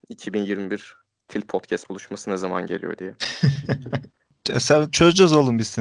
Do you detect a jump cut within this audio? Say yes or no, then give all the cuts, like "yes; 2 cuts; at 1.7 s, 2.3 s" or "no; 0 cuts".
no; 0 cuts